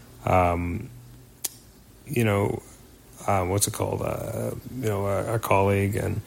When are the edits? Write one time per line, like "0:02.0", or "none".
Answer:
none